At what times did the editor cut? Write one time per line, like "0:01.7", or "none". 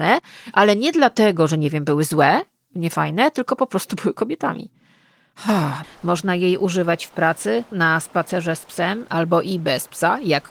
0:05.8
0:07.7